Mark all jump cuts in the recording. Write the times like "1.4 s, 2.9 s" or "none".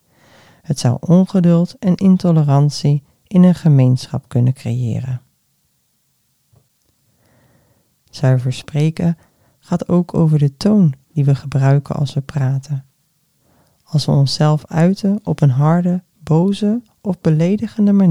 none

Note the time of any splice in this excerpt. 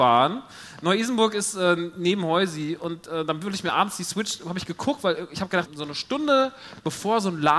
5.7 s

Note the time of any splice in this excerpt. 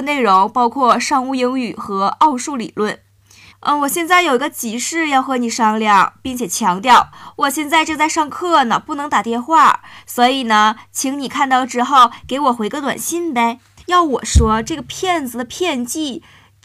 3.5 s, 13.8 s

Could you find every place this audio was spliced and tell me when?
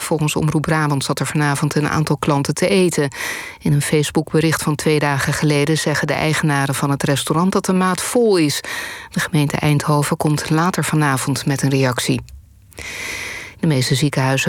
13.5 s

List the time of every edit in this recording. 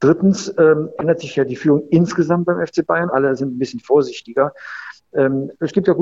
3.1 s

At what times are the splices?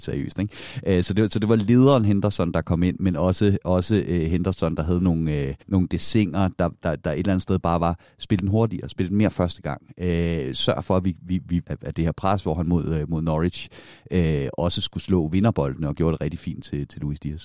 5.6 s, 11.6 s

